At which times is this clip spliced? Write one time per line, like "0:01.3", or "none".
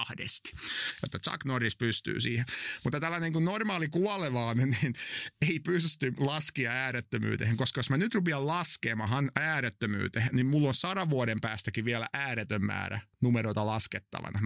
none